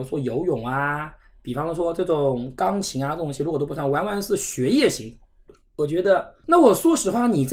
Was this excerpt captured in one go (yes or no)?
no